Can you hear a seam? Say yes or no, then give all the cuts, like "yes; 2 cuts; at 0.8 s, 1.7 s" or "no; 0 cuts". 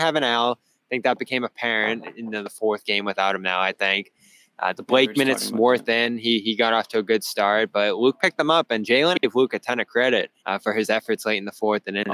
yes; 2 cuts; at 9.1 s, 10.4 s